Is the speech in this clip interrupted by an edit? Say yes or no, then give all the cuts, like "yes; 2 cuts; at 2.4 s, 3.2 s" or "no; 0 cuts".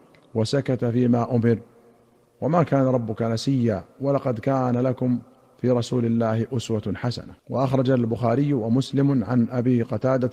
yes; 1 cut; at 7.4 s